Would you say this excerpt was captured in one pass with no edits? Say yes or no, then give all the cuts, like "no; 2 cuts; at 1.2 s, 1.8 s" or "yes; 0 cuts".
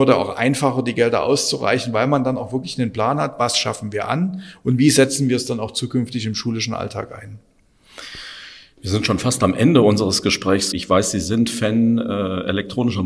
no; 1 cut; at 10.7 s